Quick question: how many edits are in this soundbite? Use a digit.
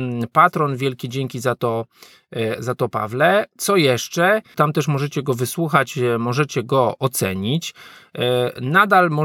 1